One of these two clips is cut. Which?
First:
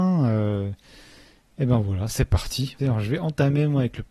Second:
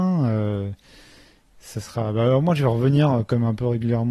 first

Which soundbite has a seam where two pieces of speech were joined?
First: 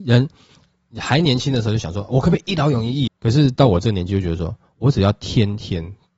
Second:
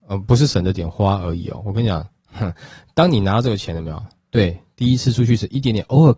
first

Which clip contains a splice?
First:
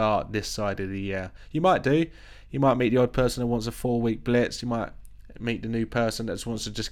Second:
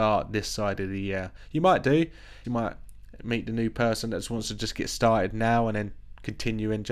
second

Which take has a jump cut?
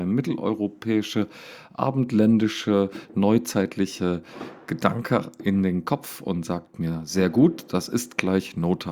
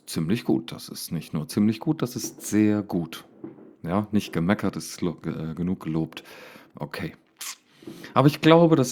second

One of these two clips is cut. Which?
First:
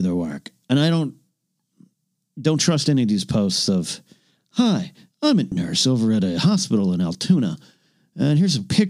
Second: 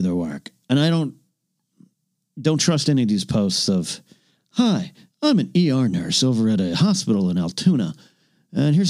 first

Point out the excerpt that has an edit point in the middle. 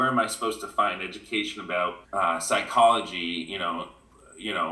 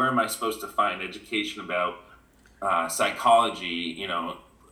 first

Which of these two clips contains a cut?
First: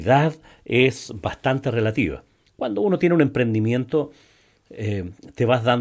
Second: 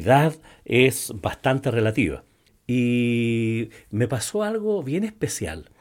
second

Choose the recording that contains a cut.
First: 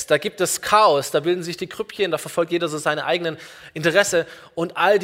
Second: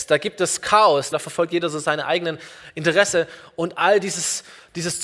second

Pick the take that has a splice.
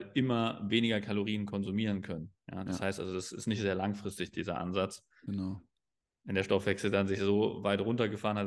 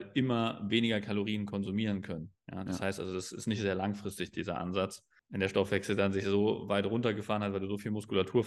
second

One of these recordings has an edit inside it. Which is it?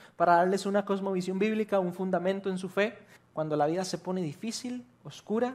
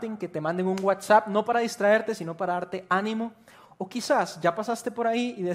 first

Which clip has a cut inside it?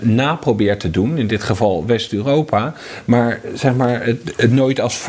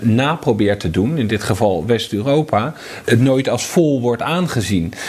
second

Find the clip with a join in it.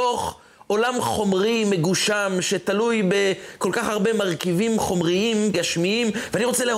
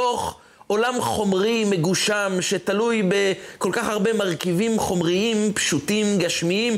first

